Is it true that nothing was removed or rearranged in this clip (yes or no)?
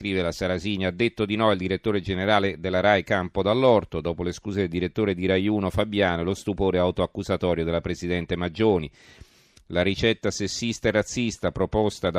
yes